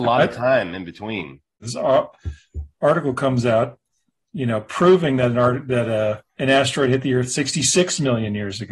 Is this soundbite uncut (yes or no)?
no